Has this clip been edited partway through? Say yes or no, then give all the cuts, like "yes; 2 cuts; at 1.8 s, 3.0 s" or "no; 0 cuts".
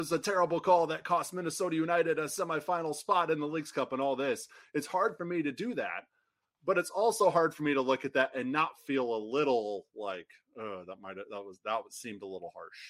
no; 0 cuts